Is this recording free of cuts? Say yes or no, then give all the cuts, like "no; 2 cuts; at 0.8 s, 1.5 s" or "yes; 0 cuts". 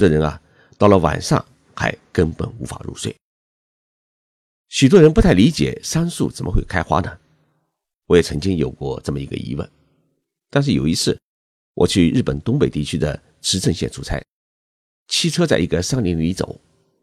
yes; 0 cuts